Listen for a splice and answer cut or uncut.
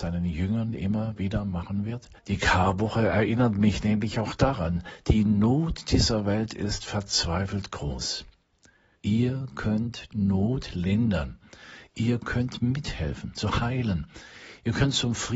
cut